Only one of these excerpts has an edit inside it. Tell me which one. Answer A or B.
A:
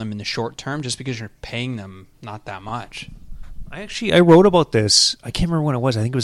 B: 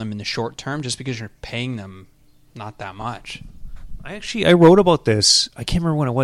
A